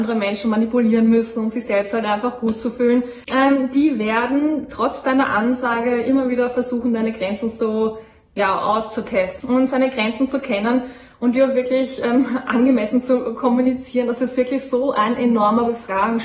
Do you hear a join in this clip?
yes; 2 cuts; at 3.2 s, 9.4 s

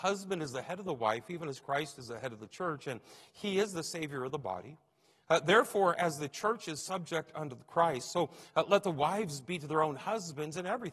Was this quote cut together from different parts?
no; 0 cuts

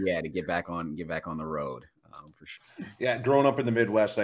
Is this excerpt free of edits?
no; 1 cut; at 2.6 s

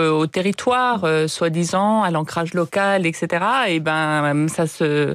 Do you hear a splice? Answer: no; 0 cuts

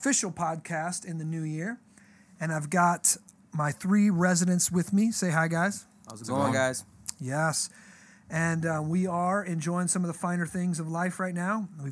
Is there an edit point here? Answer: no; 0 cuts

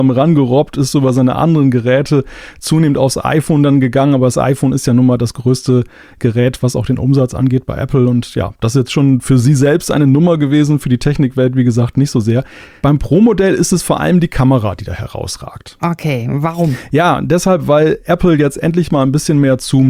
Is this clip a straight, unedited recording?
yes; 0 cuts

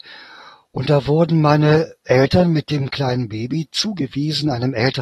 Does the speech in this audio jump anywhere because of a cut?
no; 0 cuts

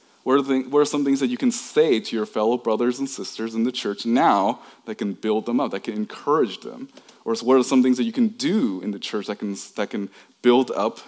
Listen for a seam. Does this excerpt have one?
no; 0 cuts

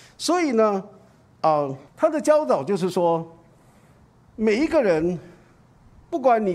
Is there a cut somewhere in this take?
yes; 1 cut; at 1.9 s

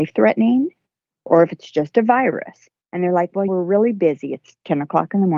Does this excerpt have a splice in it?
yes; 1 cut; at 3.5 s

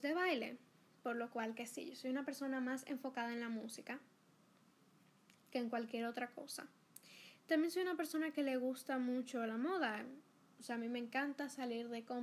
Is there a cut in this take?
no; 0 cuts

